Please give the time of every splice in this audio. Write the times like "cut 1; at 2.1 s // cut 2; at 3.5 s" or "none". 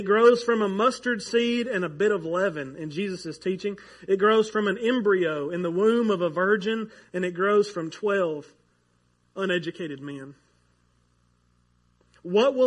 none

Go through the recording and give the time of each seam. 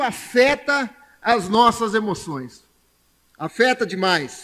none

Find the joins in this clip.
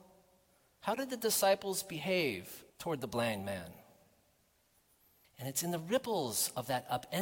cut 1; at 2.7 s // cut 2; at 5.2 s

